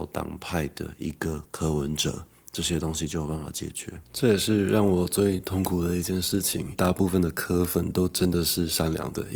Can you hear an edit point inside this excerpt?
yes; 2 cuts; at 4.0 s, 6.7 s

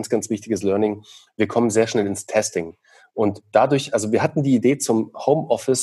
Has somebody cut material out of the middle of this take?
no; 0 cuts

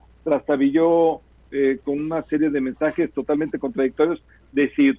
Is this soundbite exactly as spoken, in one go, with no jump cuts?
no; 1 cut; at 1.8 s

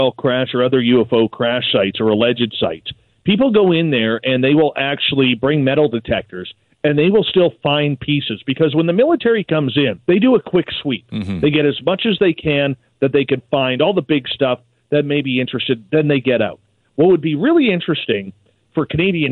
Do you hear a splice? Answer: yes; 1 cut; at 10.0 s

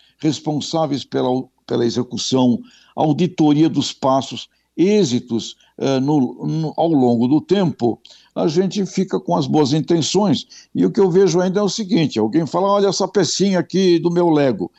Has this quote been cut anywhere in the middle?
no; 0 cuts

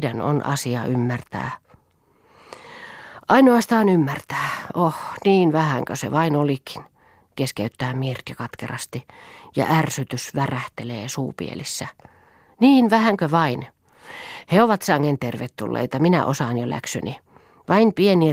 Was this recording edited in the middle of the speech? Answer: no; 0 cuts

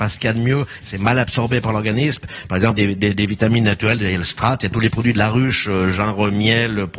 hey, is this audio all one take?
yes; 0 cuts

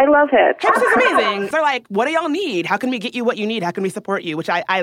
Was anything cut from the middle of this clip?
yes; 1 cut; at 1.5 s

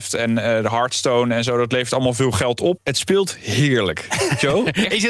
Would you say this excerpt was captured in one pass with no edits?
no; 1 cut; at 2.8 s

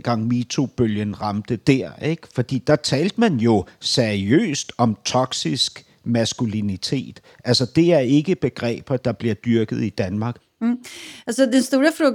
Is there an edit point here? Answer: no; 0 cuts

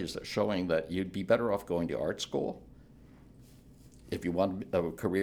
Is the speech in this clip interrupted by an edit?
no; 0 cuts

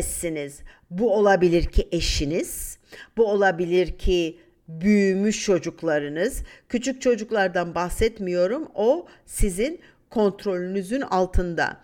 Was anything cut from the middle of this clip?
no; 0 cuts

